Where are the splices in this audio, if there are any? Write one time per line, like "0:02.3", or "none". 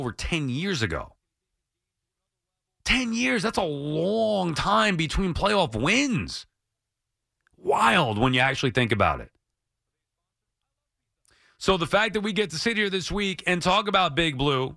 none